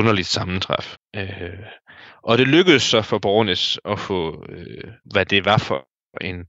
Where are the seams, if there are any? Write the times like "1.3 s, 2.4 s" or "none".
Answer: 0.9 s, 5.0 s